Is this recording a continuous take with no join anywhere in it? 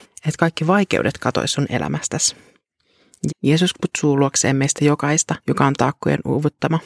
no; 2 cuts; at 3.3 s, 5.4 s

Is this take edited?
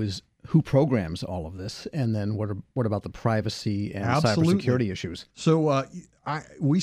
yes; 1 cut; at 5.3 s

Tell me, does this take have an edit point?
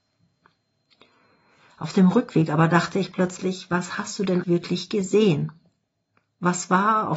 yes; 1 cut; at 4.4 s

